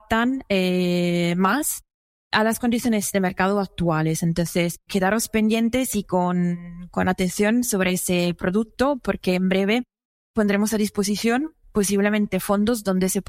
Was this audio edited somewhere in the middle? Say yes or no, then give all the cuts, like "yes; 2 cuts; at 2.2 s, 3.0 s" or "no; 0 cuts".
yes; 1 cut; at 4.9 s